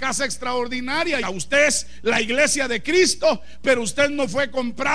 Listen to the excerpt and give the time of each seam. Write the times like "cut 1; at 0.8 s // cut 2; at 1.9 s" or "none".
cut 1; at 1.2 s